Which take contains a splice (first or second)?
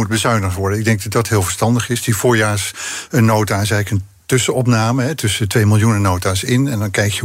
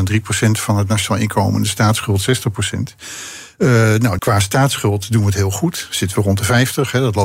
second